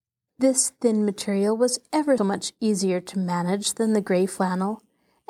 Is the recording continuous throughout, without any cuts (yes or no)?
no